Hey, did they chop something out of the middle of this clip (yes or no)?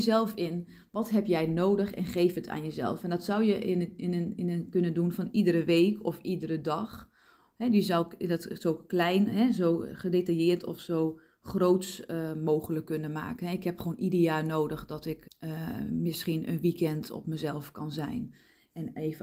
yes